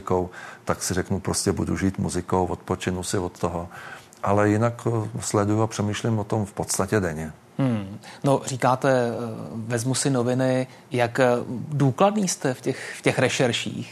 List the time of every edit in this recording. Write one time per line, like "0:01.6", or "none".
none